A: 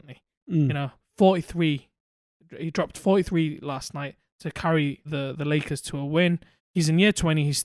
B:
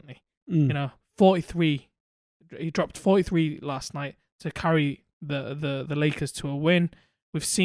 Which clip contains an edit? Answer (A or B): A